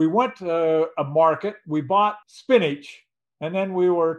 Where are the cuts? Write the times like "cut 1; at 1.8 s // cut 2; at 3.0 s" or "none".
cut 1; at 2.2 s